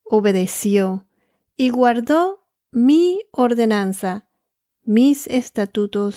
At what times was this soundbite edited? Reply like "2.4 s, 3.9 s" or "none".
4.6 s